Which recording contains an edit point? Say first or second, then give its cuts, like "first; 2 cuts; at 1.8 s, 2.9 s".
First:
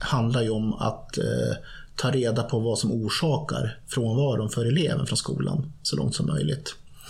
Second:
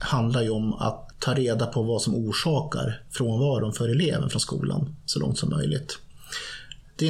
second; 1 cut; at 1.1 s